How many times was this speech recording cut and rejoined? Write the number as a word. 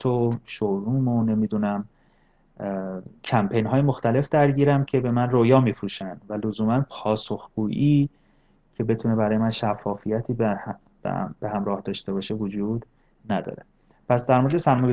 zero